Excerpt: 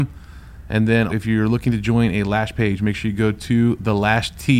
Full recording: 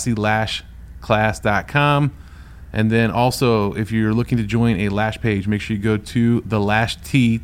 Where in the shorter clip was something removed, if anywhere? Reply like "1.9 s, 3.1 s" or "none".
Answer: 1.1 s